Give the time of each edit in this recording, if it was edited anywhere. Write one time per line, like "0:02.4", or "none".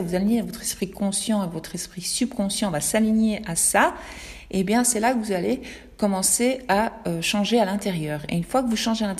none